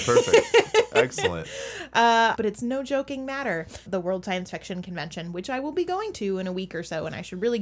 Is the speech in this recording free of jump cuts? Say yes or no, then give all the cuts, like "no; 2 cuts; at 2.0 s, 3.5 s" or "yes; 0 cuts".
no; 2 cuts; at 2.3 s, 3.9 s